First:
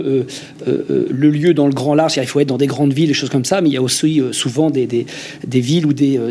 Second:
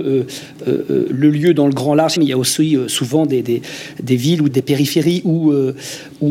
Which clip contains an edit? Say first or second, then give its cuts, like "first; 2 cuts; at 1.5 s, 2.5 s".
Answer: second; 2 cuts; at 2.2 s, 4.5 s